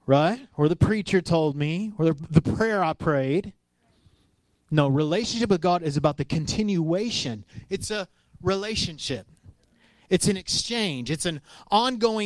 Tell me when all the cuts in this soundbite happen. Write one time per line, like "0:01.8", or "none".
none